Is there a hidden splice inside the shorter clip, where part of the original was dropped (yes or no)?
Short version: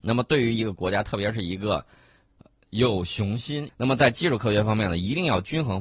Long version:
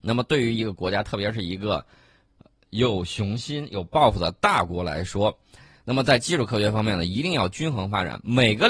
yes